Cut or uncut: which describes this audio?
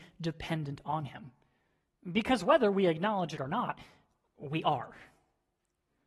uncut